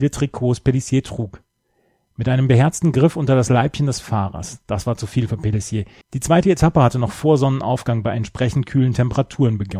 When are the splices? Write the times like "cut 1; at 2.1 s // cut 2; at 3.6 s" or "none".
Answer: cut 1; at 6.0 s